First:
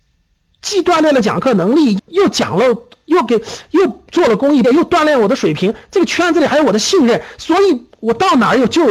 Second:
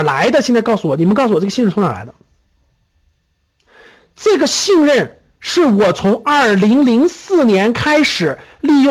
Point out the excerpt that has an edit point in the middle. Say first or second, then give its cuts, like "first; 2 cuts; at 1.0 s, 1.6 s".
first; 2 cuts; at 2.0 s, 4.6 s